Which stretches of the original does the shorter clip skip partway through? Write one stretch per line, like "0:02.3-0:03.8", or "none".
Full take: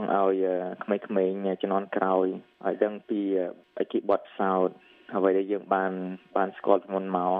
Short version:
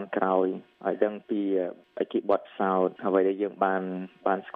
0:04.8-0:05.1